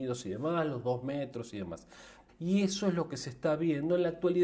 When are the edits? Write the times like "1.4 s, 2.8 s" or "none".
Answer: 2.3 s